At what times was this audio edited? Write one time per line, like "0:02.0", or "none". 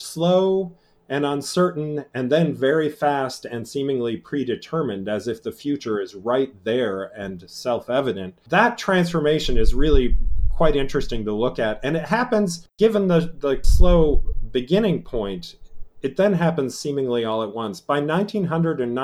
0:12.7